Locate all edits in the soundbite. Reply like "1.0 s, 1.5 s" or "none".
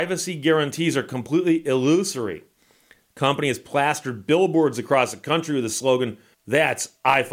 6.3 s